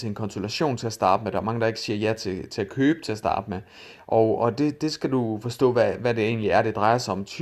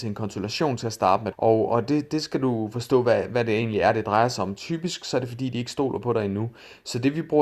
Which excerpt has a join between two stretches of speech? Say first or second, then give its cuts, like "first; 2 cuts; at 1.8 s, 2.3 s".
second; 1 cut; at 1.3 s